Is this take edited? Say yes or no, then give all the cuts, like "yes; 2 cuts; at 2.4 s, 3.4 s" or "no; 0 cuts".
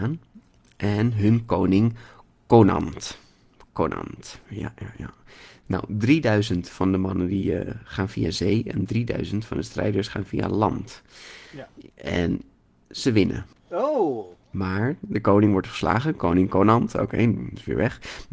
no; 0 cuts